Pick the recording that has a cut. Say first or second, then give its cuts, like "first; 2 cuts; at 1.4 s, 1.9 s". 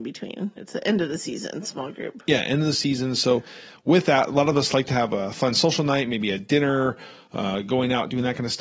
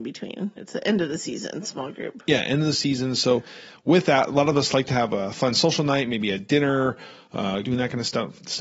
second; 1 cut; at 7.6 s